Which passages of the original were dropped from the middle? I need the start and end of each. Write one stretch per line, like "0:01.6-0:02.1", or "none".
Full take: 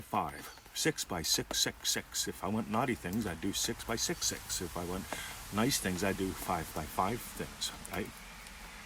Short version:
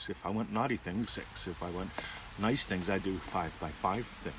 0:03.2-0:04.2